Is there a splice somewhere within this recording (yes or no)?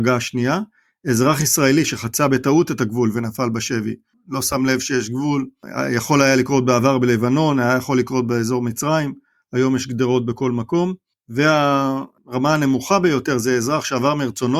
yes